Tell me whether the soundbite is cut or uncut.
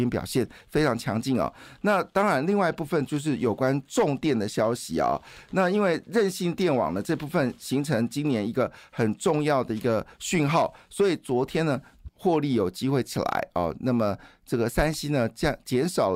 cut